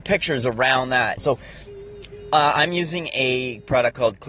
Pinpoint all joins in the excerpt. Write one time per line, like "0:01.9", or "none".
0:01.2